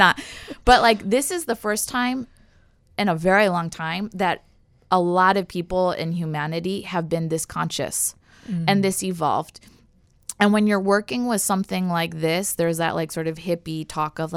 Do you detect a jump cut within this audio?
no; 0 cuts

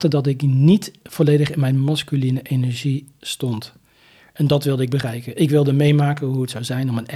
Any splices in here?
no; 0 cuts

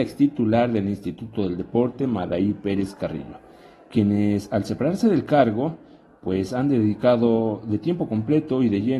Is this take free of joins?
yes; 0 cuts

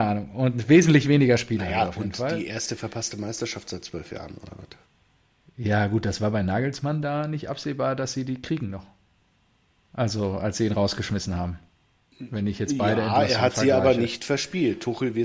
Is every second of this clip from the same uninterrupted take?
yes; 0 cuts

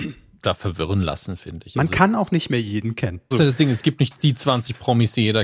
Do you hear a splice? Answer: yes; 1 cut; at 3.3 s

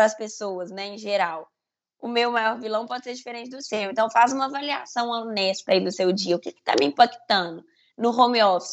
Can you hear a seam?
no; 0 cuts

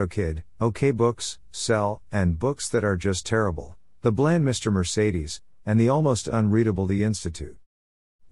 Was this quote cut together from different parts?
no; 0 cuts

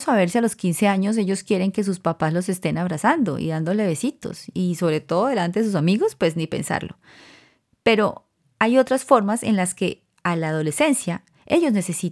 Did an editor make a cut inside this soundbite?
no; 0 cuts

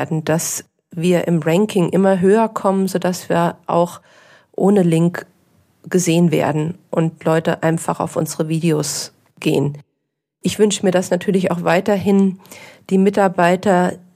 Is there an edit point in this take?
no; 0 cuts

